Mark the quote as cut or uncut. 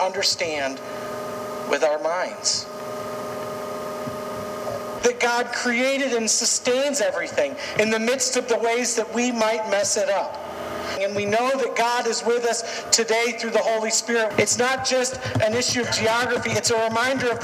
cut